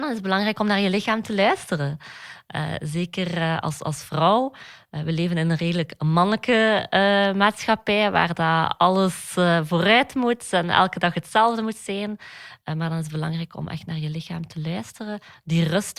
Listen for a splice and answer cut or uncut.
uncut